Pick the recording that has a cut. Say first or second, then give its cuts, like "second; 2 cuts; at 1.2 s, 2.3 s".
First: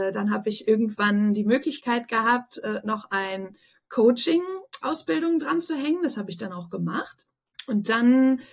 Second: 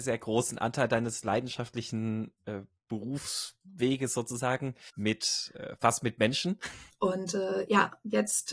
second; 2 cuts; at 4.9 s, 6.9 s